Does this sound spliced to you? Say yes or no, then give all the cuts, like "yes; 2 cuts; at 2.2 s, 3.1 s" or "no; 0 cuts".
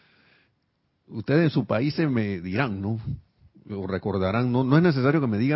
no; 0 cuts